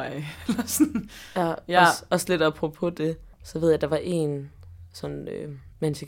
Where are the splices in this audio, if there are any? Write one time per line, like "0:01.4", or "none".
0:03.3